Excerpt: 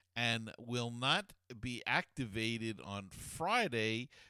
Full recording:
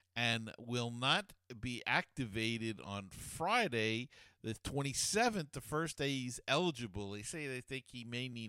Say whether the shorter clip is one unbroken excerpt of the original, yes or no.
yes